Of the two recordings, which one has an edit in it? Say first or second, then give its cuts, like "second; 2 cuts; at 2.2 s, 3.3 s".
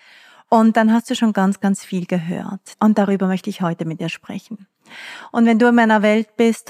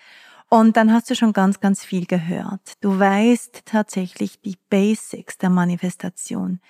first; 1 cut; at 2.7 s